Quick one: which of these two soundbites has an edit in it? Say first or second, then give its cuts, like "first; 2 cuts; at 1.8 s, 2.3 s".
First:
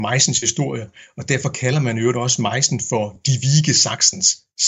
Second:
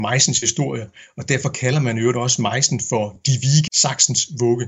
second; 1 cut; at 3.7 s